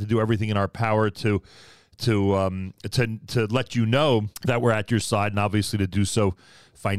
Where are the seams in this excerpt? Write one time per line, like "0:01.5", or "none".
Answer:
0:04.3